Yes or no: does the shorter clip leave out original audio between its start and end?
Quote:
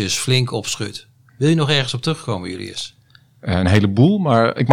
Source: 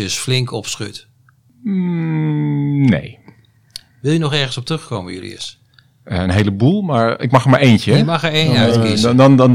yes